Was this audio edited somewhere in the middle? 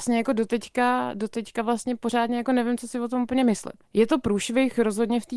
yes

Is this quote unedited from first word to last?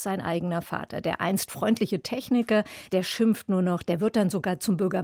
no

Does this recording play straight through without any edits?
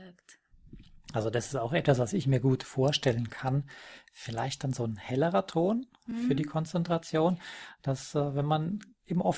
yes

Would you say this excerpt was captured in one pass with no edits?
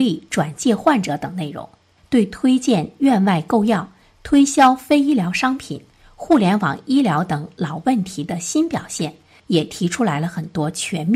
yes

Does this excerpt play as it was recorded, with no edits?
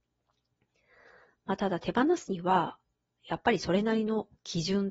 yes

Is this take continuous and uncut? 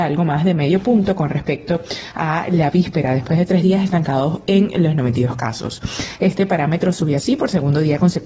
yes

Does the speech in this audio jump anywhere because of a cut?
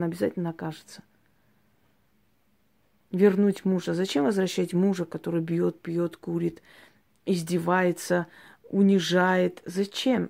no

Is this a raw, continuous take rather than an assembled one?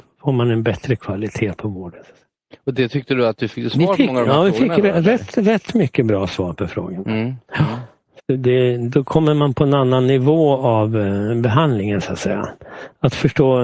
no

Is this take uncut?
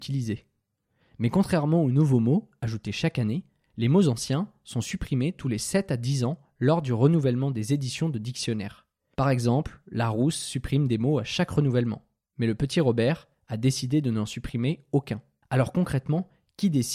no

